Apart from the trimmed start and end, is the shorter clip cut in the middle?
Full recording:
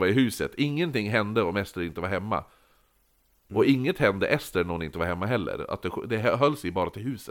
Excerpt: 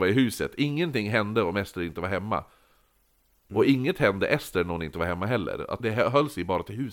yes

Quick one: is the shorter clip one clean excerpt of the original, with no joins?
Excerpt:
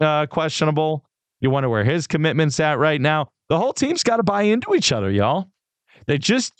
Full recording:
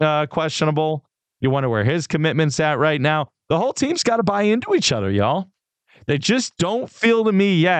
yes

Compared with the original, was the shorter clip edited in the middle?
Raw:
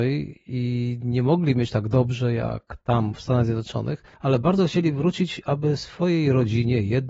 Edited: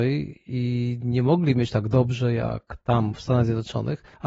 no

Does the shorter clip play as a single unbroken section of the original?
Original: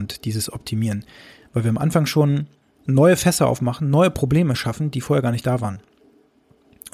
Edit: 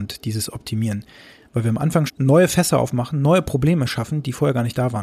no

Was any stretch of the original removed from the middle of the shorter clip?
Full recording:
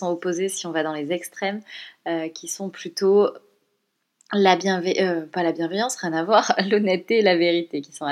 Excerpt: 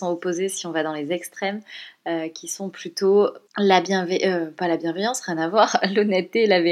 yes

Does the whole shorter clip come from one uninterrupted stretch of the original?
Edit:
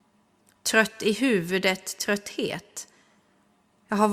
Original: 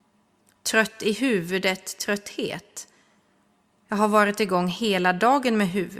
yes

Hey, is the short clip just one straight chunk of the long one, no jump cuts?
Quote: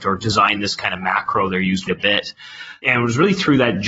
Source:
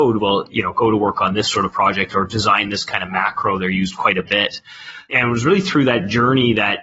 no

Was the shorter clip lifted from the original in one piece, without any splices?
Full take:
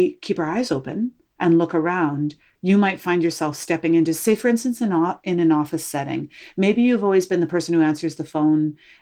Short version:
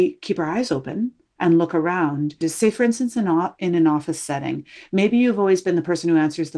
no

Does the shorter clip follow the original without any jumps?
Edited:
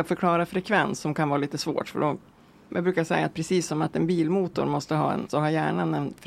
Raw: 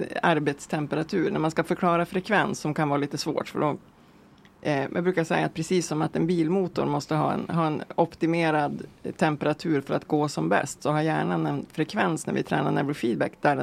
no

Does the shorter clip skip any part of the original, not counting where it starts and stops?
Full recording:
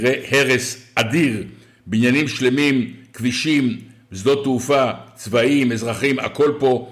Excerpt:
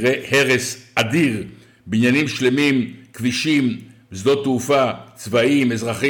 no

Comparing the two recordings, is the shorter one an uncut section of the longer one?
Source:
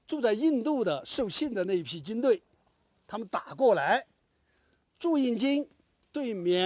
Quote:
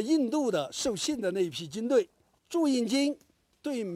no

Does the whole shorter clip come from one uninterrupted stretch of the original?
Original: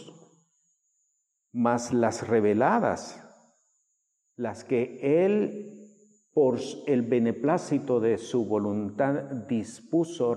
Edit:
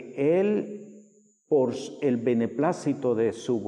yes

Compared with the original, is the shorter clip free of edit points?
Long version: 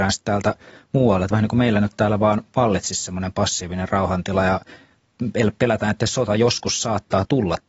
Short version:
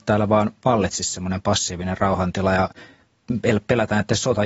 yes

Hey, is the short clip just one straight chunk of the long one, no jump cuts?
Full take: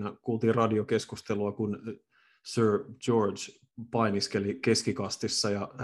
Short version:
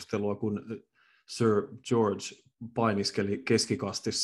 yes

